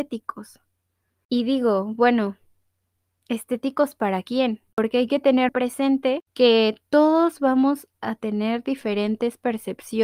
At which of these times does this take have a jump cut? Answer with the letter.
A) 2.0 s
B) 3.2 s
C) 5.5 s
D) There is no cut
C